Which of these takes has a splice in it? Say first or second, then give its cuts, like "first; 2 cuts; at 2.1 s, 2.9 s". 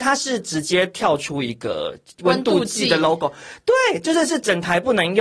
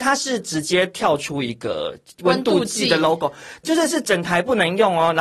second; 1 cut; at 3.6 s